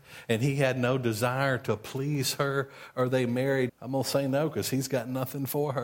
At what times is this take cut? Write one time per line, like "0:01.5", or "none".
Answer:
0:03.7